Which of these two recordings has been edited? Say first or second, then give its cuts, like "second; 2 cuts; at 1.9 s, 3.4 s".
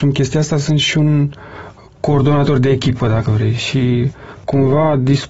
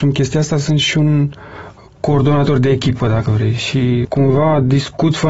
second; 1 cut; at 4.0 s